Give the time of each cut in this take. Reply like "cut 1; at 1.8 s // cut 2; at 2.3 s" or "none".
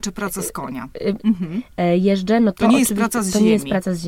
cut 1; at 1.2 s